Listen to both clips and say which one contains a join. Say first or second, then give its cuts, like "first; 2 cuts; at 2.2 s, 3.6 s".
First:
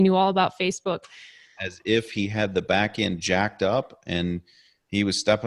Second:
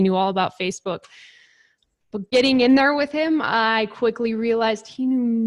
first; 1 cut; at 1.6 s